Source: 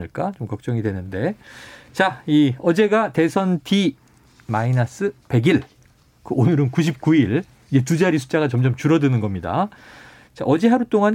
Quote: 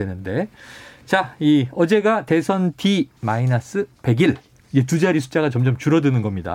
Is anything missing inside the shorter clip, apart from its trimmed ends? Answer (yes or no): yes